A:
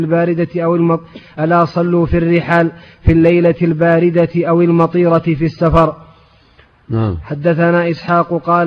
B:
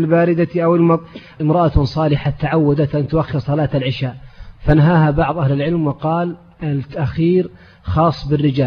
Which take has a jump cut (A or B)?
B